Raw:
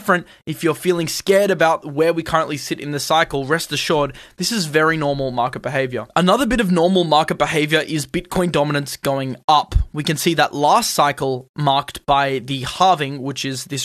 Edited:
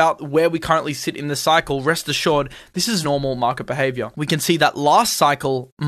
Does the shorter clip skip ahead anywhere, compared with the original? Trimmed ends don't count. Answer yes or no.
yes